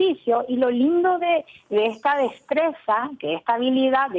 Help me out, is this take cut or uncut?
uncut